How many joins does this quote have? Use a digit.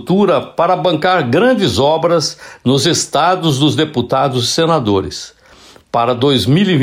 0